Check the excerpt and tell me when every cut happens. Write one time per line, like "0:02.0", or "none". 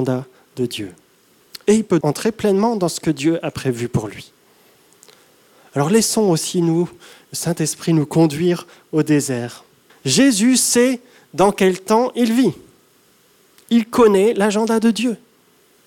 0:02.0
0:09.9